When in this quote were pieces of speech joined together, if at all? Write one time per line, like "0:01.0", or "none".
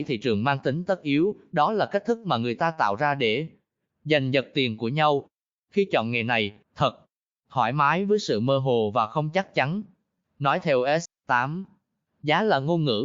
0:06.6
0:11.1